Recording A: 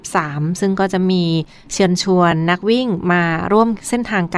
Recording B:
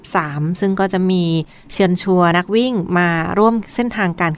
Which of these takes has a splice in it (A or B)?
B